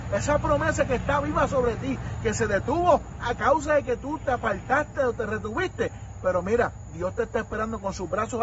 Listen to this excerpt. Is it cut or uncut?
uncut